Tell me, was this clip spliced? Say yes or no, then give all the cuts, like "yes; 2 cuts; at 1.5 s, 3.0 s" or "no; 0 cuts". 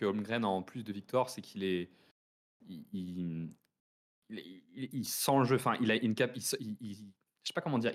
no; 0 cuts